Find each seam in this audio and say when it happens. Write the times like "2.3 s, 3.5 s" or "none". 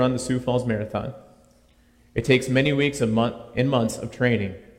2.0 s